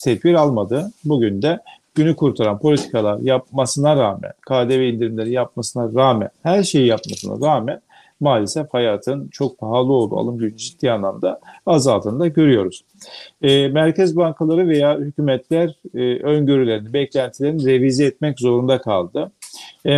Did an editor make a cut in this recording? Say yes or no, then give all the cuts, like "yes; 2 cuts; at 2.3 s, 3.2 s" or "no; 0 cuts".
no; 0 cuts